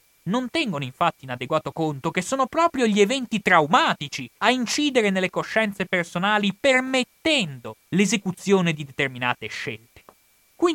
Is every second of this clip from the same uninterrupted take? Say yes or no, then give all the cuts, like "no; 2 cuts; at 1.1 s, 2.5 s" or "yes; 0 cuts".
no; 2 cuts; at 4.4 s, 7.9 s